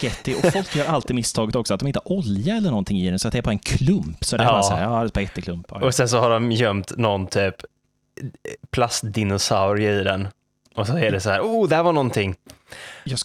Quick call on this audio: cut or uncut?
uncut